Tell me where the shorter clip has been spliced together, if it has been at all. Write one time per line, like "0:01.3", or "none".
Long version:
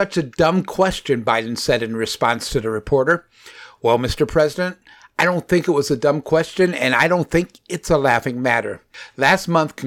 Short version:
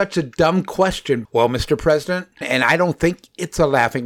0:01.2
0:02.4